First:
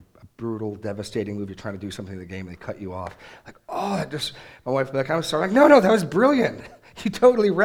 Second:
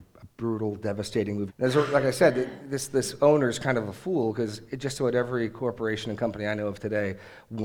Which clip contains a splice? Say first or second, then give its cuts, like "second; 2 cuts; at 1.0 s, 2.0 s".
second; 1 cut; at 1.5 s